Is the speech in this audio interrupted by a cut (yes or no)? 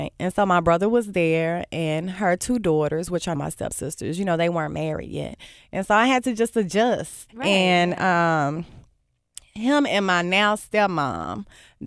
yes